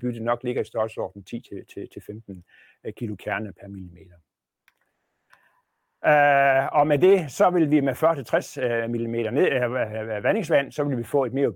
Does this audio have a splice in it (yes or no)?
no